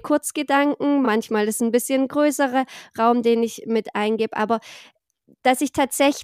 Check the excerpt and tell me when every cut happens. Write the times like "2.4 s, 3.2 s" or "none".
none